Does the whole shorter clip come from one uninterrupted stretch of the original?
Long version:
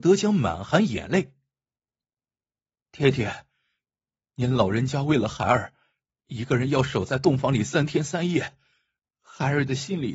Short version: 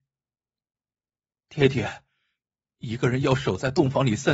no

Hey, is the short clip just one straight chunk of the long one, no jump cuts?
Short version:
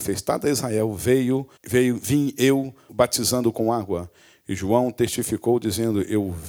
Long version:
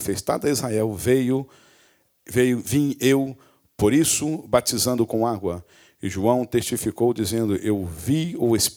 no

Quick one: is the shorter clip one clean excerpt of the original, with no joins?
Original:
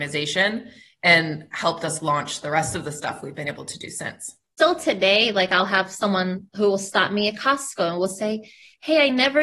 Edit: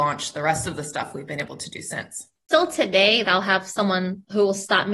no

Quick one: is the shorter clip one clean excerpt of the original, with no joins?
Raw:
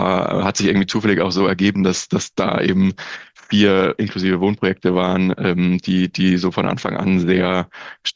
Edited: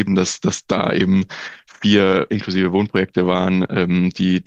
yes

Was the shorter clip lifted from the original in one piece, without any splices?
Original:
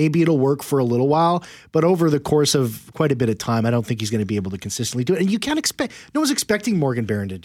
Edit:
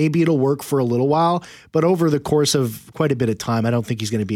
yes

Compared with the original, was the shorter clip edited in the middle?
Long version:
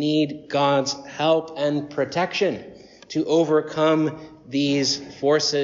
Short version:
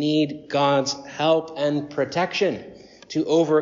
no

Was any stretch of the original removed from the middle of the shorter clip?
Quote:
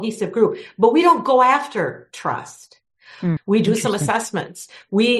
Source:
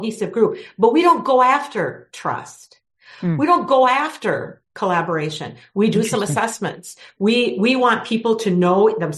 yes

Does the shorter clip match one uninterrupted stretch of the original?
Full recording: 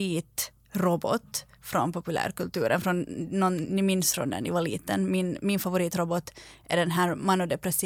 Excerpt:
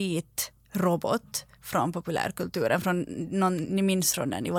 yes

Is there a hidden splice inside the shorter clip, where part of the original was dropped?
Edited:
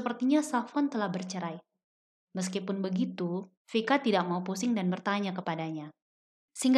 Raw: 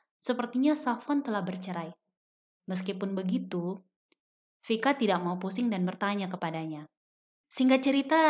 yes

